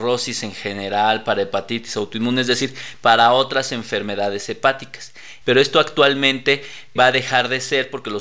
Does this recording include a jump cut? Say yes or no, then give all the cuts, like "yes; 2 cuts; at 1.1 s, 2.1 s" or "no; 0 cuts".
yes; 2 cuts; at 5.4 s, 7.0 s